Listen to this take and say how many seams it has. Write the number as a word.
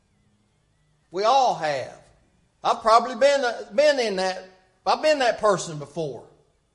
one